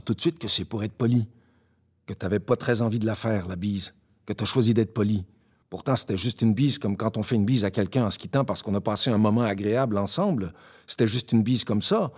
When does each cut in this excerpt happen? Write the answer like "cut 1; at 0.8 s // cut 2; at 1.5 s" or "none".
cut 1; at 5.6 s